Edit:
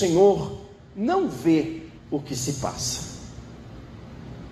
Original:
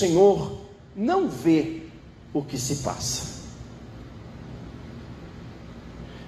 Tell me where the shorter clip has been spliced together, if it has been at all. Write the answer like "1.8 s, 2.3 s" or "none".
2.0 s